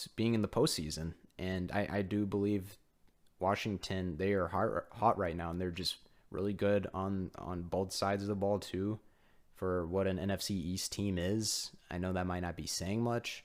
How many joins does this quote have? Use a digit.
0